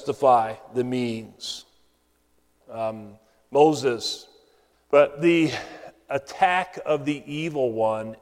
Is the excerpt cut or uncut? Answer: cut